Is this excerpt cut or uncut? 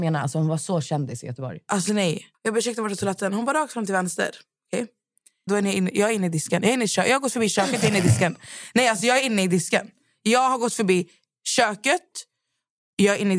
cut